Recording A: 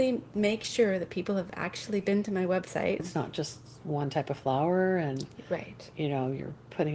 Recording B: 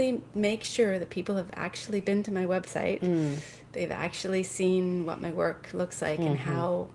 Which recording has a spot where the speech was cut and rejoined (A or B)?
A